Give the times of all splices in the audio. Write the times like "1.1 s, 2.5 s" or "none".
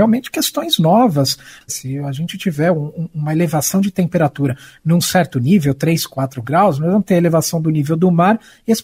1.7 s